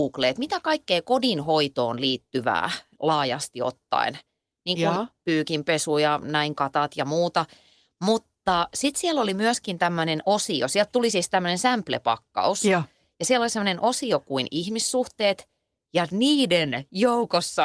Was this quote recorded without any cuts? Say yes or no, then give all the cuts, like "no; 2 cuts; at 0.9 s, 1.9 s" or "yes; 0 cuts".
yes; 0 cuts